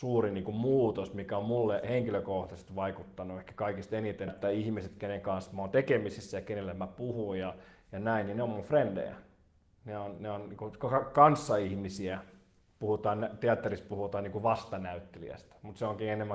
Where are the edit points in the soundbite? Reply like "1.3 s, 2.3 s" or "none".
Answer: 4.3 s